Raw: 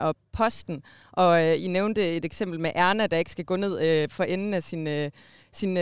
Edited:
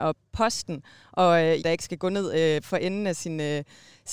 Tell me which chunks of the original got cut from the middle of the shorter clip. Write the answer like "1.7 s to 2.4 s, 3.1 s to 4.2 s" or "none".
1.6 s to 3.1 s

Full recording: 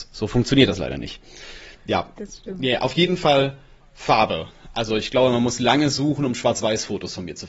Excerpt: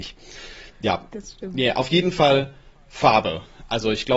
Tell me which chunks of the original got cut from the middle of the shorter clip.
none

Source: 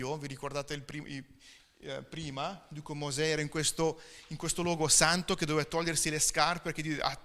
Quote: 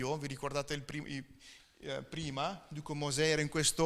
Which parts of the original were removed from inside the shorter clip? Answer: none

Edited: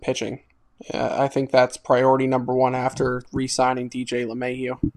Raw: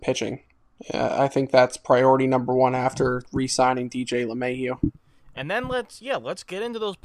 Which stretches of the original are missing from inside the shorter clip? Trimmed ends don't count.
none

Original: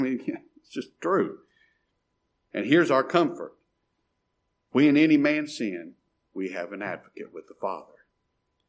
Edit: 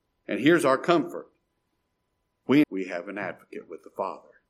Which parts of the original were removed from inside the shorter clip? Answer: 4.9 s to 6.3 s

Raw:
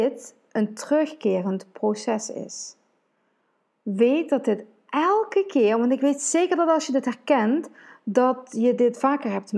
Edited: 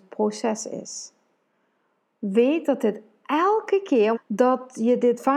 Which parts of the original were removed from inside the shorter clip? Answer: 5.8 s to 7.9 s

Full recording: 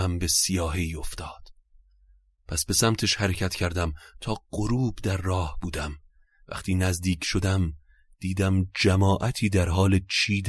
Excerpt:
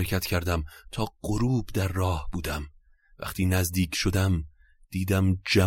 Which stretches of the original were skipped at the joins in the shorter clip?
none

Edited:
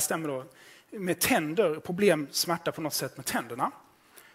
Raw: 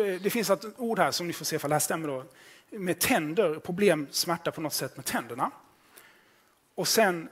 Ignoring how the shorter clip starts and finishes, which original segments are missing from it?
none

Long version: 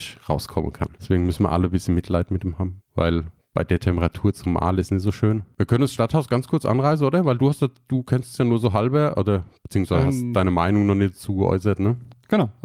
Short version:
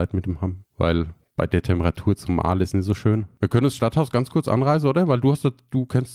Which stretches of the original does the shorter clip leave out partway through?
none

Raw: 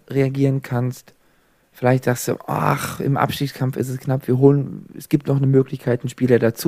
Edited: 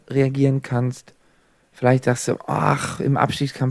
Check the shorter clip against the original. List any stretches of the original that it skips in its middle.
none

